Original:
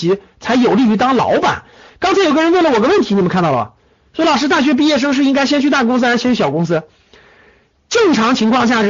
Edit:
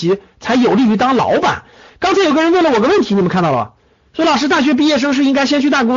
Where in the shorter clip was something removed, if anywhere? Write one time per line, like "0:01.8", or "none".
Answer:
none